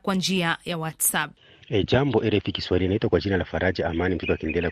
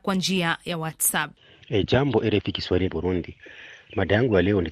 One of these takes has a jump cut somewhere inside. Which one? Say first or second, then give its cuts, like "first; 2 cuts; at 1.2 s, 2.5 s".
second; 1 cut; at 2.9 s